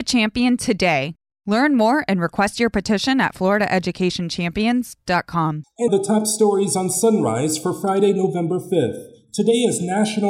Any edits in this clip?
yes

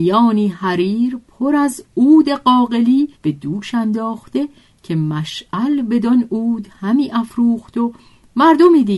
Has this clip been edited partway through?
yes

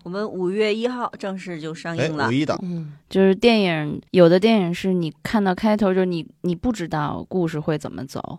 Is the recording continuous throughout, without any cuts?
no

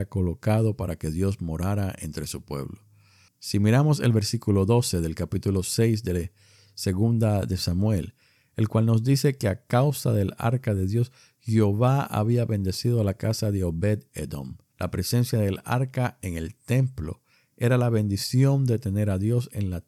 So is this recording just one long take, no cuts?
no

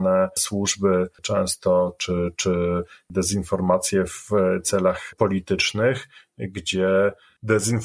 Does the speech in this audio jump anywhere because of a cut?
no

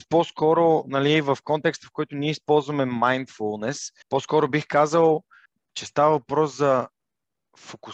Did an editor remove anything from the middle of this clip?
yes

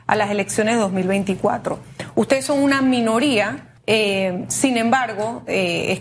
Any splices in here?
yes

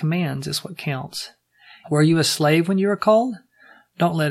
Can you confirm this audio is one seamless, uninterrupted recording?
no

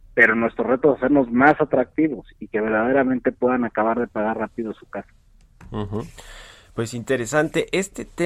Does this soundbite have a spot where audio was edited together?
no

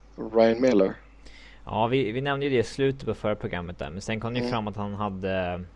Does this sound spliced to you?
no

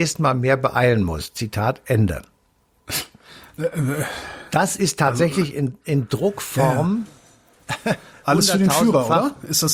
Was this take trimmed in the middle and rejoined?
no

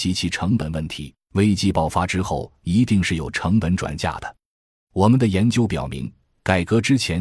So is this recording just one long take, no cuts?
yes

